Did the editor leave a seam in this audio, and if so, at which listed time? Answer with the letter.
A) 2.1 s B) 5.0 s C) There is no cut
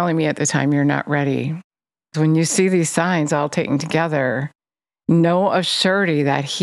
A